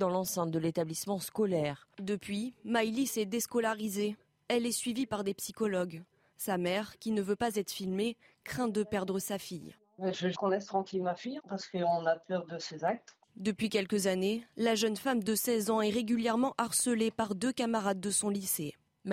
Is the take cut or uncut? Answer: cut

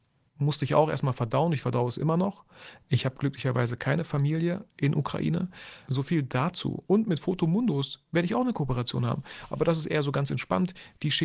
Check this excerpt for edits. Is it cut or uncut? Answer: cut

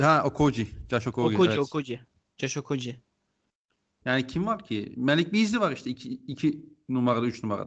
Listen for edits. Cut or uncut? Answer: cut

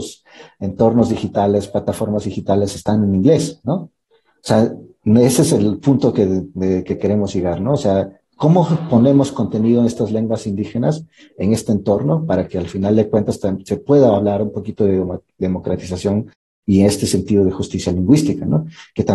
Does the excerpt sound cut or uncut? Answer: uncut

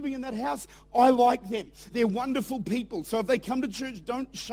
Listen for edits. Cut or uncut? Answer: uncut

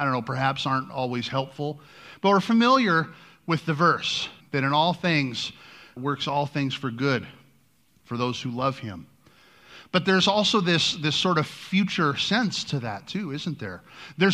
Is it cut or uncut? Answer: cut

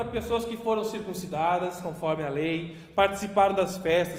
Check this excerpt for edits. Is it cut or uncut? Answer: uncut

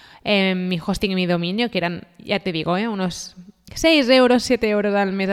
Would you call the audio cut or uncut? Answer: uncut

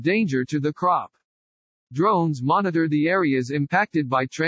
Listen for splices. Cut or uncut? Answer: uncut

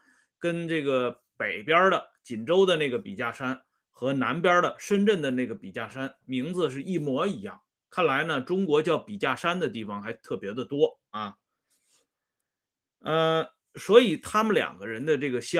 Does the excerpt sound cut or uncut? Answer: uncut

